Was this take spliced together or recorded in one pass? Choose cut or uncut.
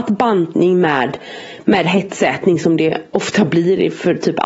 uncut